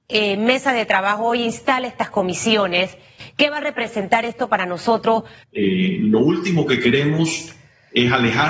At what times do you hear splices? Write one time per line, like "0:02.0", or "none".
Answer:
0:05.4